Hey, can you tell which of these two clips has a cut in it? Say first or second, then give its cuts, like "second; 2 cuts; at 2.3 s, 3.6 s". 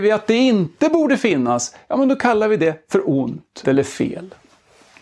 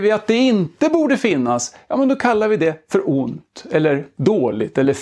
first; 1 cut; at 3.6 s